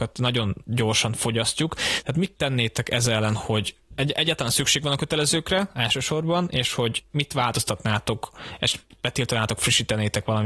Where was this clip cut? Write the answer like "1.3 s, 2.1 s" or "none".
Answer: none